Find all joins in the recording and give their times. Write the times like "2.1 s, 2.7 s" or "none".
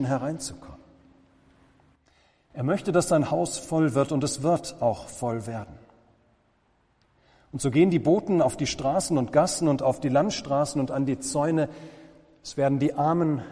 none